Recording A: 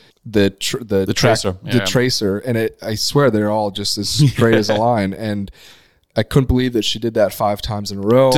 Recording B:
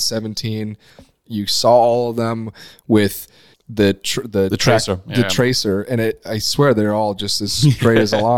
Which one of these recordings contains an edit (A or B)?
B